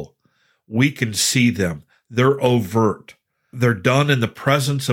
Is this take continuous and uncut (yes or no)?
yes